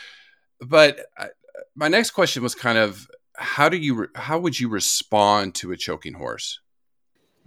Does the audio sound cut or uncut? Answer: uncut